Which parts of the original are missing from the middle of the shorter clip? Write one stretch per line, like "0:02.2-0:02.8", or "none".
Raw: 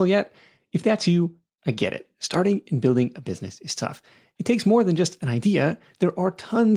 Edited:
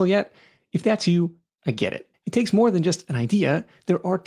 0:02.1-0:04.3